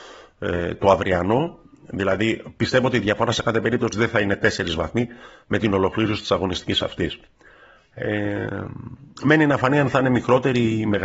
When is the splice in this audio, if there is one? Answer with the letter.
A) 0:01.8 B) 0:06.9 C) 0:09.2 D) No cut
C